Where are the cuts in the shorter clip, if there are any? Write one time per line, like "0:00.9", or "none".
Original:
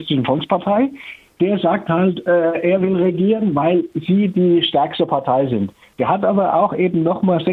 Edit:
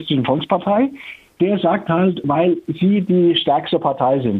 0:02.2